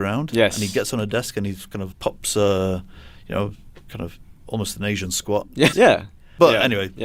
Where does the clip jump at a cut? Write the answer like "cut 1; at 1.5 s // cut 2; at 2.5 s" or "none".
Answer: cut 1; at 1.9 s // cut 2; at 5.7 s